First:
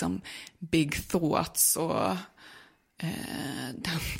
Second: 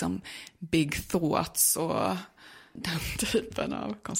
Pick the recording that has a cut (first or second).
second